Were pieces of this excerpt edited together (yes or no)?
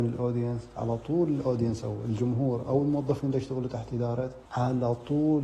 yes